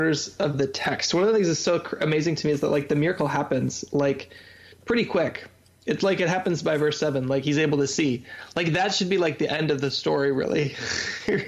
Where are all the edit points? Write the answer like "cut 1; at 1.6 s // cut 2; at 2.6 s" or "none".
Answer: none